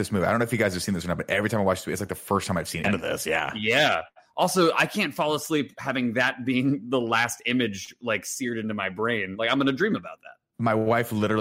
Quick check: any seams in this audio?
yes; 1 cut; at 2.8 s

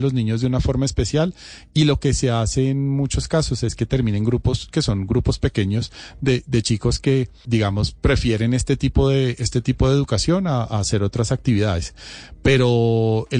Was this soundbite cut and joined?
yes; 1 cut; at 7.5 s

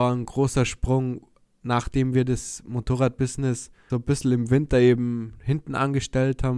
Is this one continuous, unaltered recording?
no; 1 cut; at 3.9 s

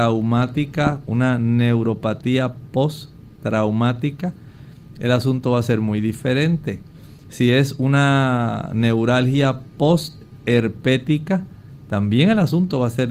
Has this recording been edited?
no; 0 cuts

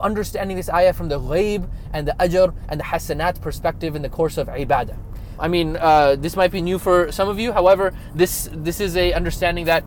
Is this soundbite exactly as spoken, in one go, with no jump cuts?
no; 1 cut; at 5.4 s

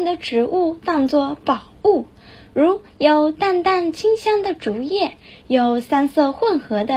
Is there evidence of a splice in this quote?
no; 0 cuts

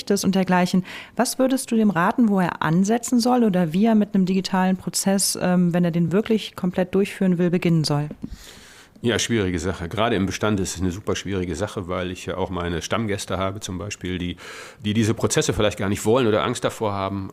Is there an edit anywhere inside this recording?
no; 0 cuts

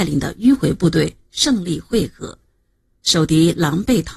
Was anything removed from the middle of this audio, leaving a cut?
no; 0 cuts

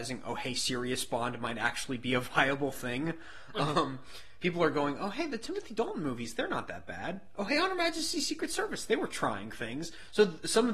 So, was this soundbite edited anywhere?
no; 0 cuts

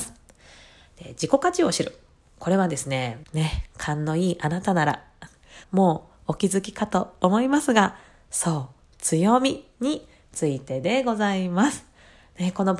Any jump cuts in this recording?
yes; 2 cuts; at 3.2 s, 5.6 s

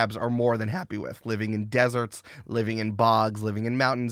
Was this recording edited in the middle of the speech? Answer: no; 0 cuts

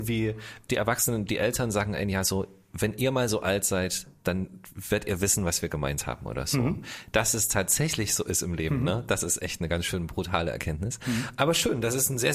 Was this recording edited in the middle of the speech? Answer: no; 0 cuts

